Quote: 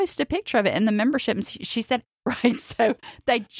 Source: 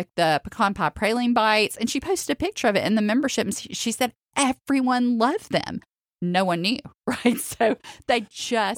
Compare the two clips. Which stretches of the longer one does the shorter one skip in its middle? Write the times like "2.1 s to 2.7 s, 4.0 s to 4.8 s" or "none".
4.3 s to 7.0 s